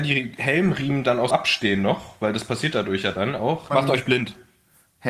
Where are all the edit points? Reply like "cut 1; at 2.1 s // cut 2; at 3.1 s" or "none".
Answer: cut 1; at 1.3 s // cut 2; at 3.7 s

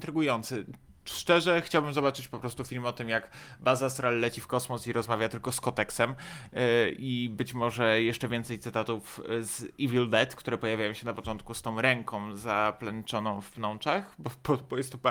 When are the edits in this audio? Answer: none

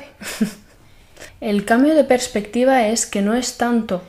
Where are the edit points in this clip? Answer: cut 1; at 1.3 s

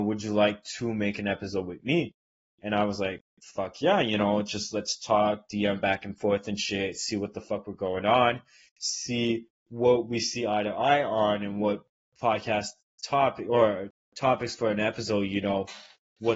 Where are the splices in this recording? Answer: none

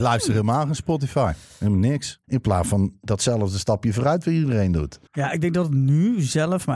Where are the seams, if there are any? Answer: cut 1; at 2.2 s // cut 2; at 5.1 s

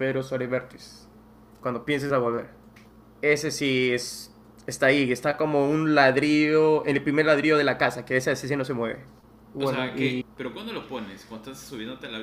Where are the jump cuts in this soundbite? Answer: cut 1; at 10.2 s

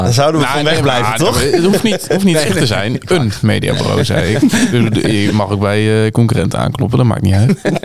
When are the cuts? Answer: none

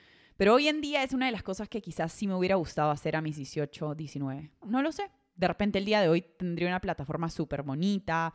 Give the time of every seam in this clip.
cut 1; at 4.6 s

